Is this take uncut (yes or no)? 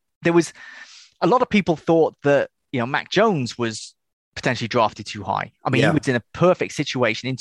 yes